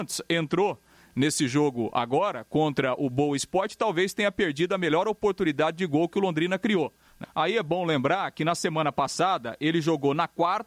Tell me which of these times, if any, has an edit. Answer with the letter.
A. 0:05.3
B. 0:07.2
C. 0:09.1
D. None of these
B